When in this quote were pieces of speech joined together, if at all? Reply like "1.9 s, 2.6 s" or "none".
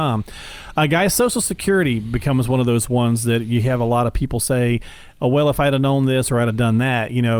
none